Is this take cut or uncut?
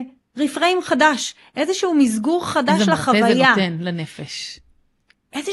uncut